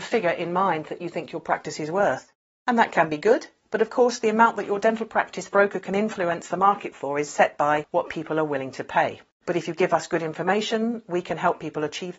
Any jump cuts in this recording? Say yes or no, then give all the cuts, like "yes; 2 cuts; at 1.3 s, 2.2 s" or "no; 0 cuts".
no; 0 cuts